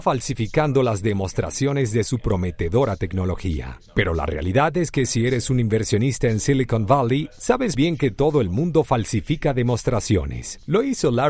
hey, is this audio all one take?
no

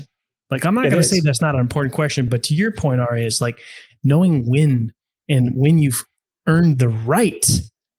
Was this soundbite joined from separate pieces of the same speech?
no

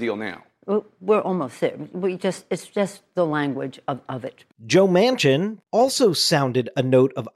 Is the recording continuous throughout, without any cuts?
no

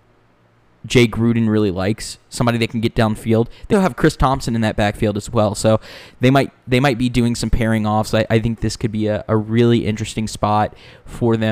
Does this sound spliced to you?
yes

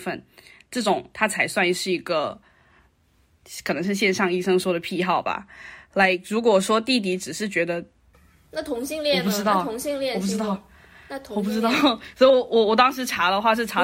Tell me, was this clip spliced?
no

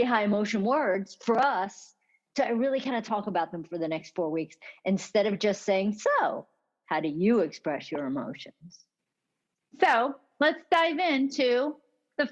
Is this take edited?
no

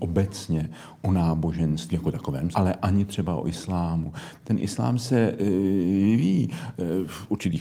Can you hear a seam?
yes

